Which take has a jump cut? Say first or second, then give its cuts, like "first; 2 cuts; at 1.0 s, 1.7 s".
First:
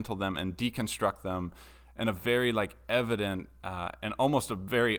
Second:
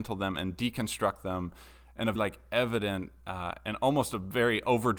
second; 1 cut; at 2.2 s